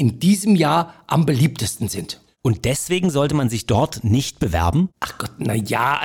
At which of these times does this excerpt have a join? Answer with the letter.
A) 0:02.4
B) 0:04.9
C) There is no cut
B